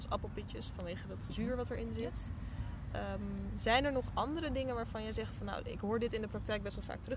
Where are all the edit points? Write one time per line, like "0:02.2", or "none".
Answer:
0:01.3